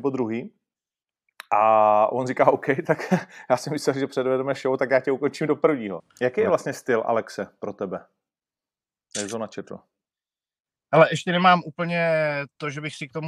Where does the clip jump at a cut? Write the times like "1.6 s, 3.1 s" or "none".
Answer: 6.0 s